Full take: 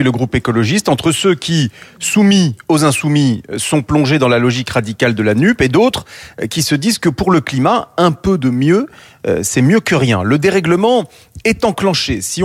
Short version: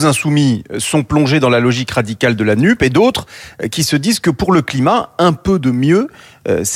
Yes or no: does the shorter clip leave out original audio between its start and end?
no